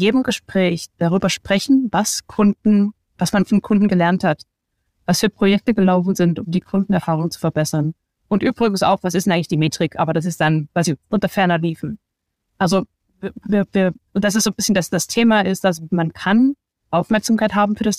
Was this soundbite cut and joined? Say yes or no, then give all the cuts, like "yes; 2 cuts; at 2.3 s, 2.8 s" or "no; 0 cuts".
no; 0 cuts